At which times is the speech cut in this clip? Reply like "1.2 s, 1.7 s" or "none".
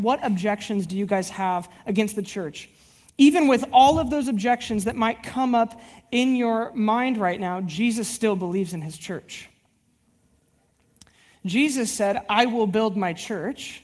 none